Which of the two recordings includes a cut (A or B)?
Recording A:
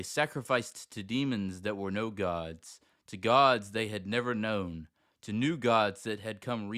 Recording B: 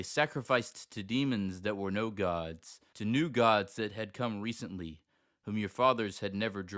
B